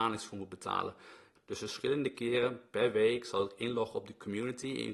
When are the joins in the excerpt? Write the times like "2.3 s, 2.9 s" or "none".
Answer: 1.4 s